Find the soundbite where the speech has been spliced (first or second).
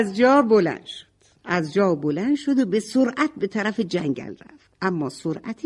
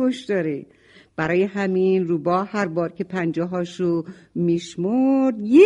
first